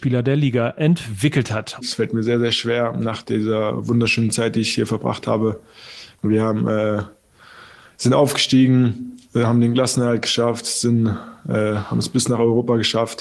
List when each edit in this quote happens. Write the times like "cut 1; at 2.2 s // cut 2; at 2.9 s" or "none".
cut 1; at 1.8 s // cut 2; at 6.2 s